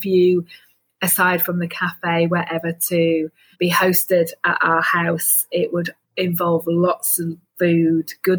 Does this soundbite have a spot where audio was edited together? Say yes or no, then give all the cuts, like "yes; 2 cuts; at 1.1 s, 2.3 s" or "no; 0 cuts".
yes; 2 cuts; at 3.5 s, 6.0 s